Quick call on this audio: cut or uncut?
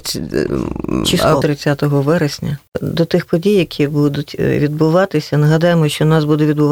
cut